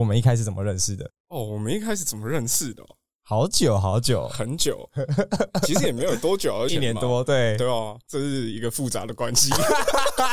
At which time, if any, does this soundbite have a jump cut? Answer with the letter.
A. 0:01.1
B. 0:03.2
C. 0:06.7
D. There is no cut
C